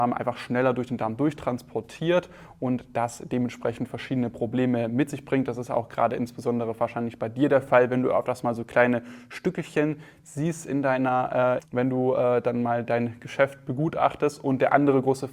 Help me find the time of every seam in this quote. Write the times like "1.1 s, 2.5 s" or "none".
11.6 s